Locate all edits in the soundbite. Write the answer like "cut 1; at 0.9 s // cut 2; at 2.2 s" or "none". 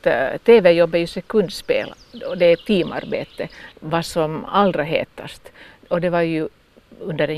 cut 1; at 3.7 s